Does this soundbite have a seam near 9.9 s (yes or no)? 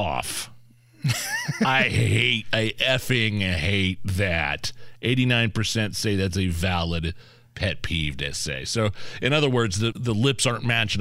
yes